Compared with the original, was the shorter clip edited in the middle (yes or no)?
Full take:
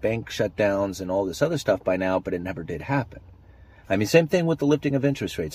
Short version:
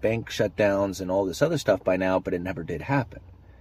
no